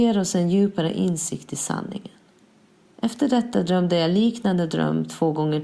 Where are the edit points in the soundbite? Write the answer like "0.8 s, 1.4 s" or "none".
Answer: 2.8 s